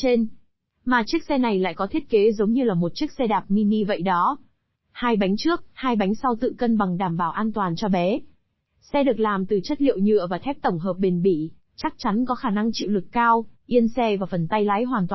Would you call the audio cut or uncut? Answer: cut